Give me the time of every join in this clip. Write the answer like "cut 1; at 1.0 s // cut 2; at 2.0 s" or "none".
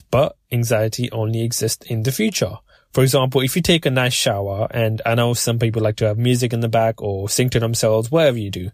cut 1; at 2.8 s